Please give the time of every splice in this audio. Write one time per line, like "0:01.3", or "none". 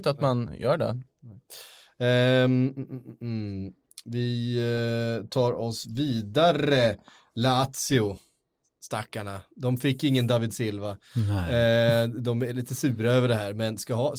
none